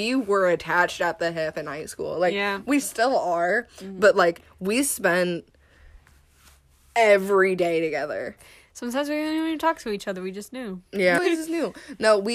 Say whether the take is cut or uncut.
cut